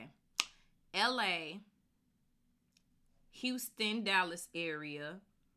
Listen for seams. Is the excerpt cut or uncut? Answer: uncut